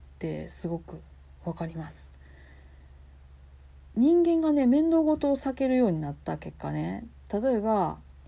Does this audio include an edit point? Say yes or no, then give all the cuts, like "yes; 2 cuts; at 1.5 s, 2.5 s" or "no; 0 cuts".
no; 0 cuts